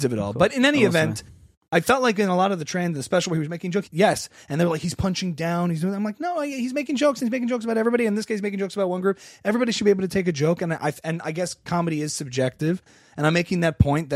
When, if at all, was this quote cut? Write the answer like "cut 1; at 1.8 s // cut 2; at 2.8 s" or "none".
cut 1; at 3.8 s